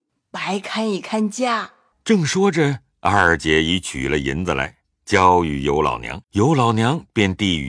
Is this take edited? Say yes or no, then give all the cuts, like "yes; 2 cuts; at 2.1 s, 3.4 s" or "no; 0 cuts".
yes; 2 cuts; at 1.9 s, 6.2 s